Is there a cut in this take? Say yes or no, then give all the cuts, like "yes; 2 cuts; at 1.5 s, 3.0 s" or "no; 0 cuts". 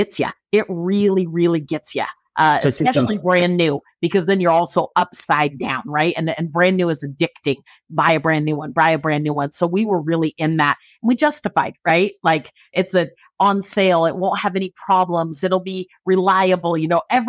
no; 0 cuts